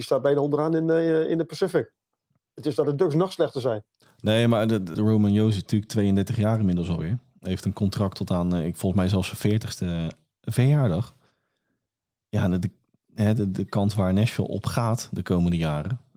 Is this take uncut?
no; 1 cut; at 4.9 s

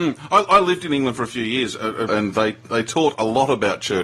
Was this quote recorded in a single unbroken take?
no; 1 cut; at 2.1 s

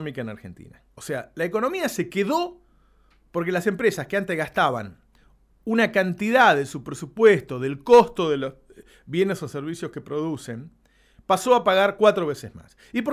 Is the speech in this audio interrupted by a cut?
yes; 1 cut; at 0.9 s

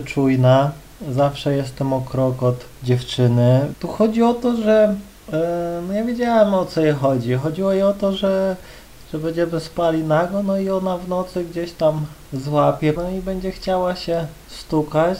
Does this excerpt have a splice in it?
yes; 2 cuts; at 3.7 s, 13.0 s

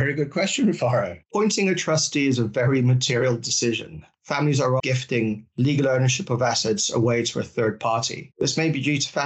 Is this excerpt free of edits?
no; 2 cuts; at 4.8 s, 8.3 s

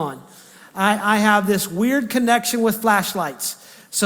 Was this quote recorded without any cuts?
yes; 0 cuts

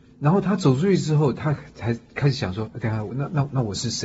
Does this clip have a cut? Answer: no; 0 cuts

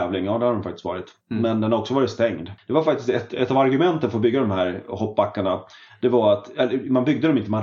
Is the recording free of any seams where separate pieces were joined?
no; 1 cut; at 2.6 s

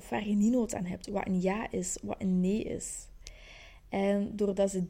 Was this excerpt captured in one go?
yes; 0 cuts

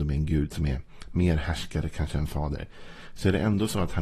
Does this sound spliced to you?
no; 0 cuts

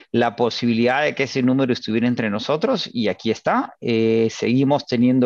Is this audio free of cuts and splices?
yes; 0 cuts

